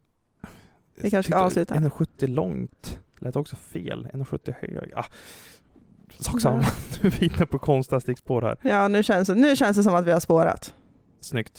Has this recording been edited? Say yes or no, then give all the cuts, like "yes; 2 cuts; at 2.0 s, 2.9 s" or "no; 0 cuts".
no; 0 cuts